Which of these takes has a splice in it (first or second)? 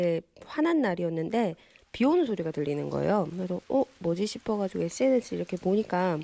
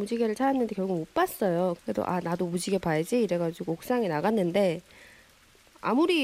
second